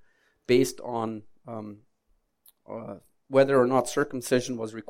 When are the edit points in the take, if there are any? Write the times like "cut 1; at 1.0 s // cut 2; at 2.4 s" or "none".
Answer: none